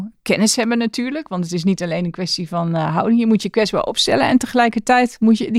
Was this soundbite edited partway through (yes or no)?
no